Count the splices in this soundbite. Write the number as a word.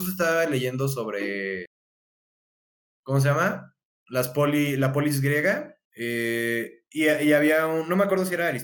one